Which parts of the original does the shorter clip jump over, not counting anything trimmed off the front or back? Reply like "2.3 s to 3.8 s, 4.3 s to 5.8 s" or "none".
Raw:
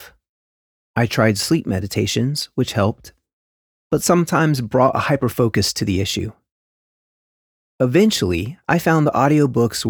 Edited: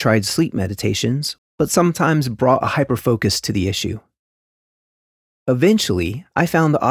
2.5 s to 3.7 s

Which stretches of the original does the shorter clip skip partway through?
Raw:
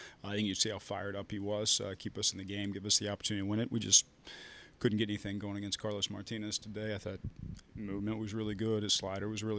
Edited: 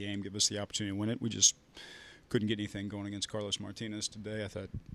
none

